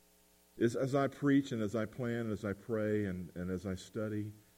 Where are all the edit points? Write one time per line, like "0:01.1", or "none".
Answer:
none